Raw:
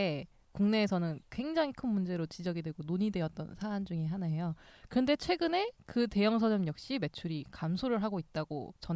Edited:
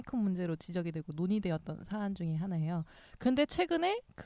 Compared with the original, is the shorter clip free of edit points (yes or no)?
yes